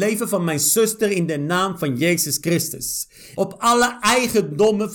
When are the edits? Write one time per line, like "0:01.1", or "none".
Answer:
0:03.4